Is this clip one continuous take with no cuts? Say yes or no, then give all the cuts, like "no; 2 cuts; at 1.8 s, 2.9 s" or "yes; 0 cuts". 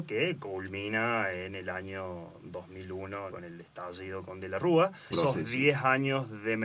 no; 2 cuts; at 3.3 s, 5.1 s